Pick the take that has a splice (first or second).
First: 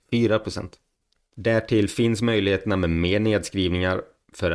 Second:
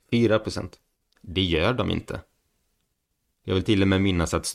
second